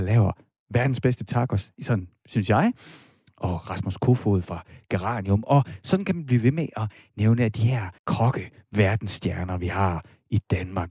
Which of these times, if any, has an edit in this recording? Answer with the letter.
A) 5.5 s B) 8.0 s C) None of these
B